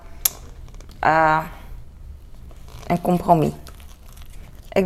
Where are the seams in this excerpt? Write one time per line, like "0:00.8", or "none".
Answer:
none